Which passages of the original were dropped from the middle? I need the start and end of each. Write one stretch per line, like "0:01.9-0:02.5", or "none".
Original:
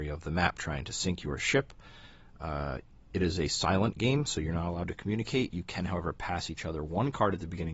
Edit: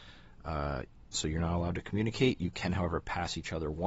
0:03.1-0:04.3